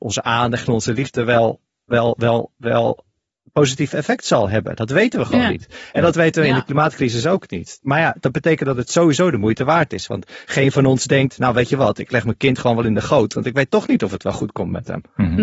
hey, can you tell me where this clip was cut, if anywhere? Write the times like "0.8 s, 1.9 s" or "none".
none